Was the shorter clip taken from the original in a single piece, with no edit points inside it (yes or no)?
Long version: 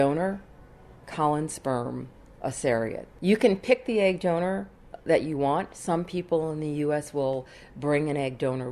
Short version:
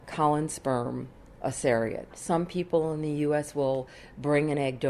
no